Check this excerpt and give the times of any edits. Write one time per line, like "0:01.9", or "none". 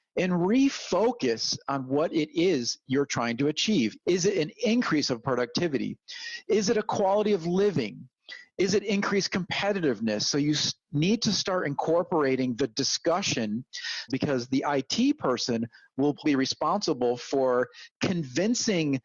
0:04.0
0:14.1
0:16.2